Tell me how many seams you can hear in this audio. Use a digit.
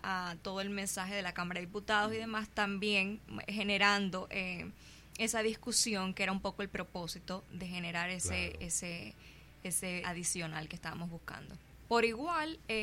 2